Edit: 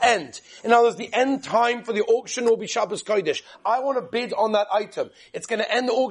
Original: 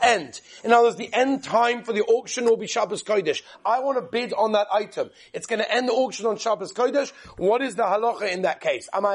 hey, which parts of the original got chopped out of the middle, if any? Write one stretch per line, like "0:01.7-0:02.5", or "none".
none